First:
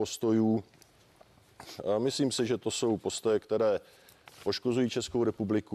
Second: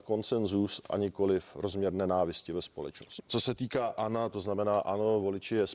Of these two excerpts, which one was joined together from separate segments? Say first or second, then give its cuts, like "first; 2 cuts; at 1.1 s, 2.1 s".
second; 2 cuts; at 3.2 s, 4.3 s